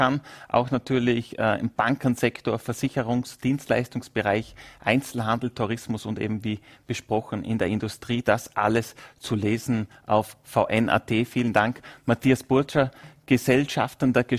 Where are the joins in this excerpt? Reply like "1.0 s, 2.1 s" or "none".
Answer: none